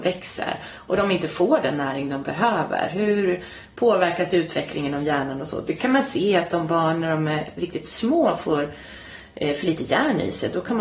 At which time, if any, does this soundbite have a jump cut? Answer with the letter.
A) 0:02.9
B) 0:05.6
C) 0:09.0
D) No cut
D